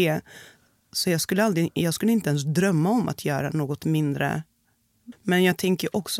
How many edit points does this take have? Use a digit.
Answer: 1